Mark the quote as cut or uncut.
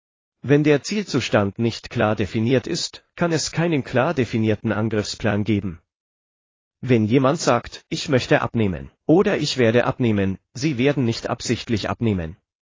cut